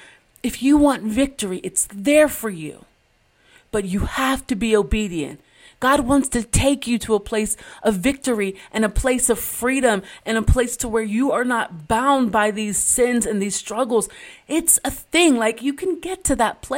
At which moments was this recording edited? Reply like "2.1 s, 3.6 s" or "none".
none